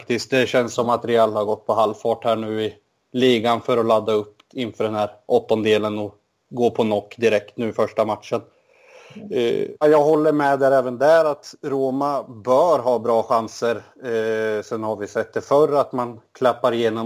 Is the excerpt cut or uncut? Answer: cut